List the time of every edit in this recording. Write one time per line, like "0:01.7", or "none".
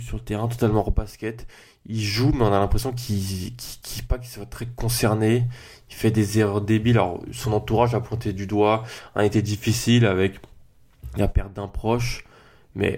none